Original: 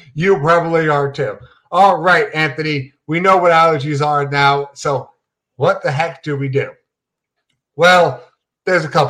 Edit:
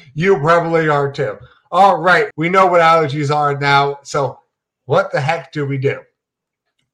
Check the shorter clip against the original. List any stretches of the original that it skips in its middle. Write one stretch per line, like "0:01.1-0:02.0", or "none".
0:02.3-0:03.0